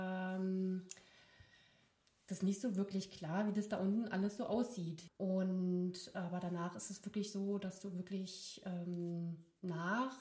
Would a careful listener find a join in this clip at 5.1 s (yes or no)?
yes